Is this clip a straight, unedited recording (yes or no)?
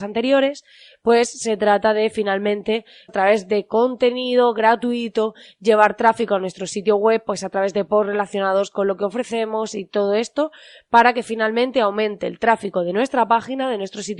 no